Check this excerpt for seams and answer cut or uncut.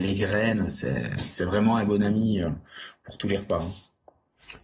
uncut